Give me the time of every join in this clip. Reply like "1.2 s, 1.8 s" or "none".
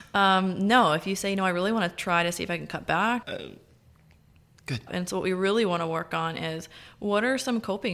3.2 s, 4.9 s